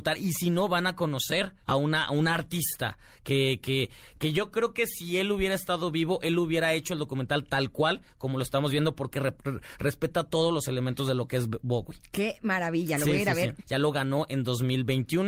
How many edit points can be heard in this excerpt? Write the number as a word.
two